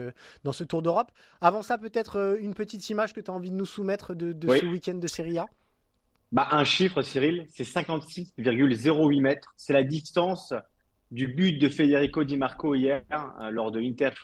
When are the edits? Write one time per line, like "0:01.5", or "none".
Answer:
none